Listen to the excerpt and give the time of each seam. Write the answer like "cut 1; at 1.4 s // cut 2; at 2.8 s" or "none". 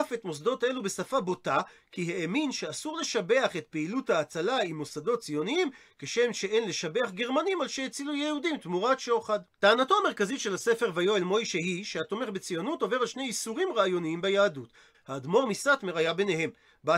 cut 1; at 9.5 s // cut 2; at 14.9 s